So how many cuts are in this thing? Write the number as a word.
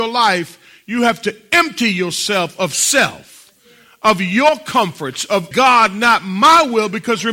one